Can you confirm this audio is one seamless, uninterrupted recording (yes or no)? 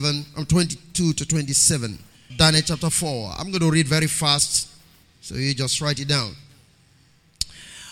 no